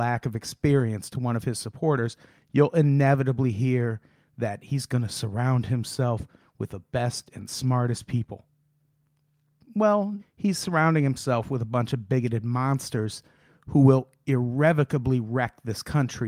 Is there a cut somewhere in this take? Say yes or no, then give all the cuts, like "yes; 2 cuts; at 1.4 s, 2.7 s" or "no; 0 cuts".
yes; 1 cut; at 10.2 s